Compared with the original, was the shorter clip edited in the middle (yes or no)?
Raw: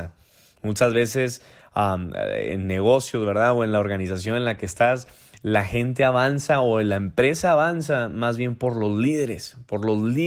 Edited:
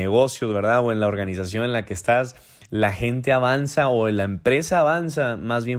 no